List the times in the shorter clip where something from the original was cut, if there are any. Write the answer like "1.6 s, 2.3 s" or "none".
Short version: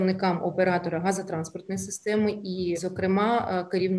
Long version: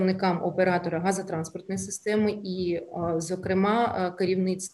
2.8 s